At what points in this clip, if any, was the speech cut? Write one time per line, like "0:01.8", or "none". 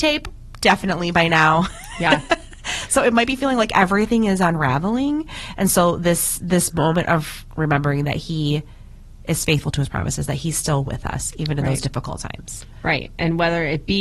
none